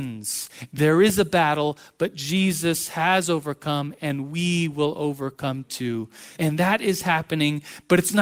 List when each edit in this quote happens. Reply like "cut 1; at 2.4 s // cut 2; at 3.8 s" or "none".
cut 1; at 6.4 s